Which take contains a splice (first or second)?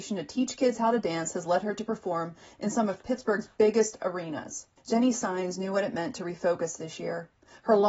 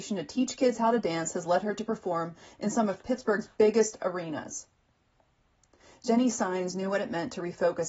first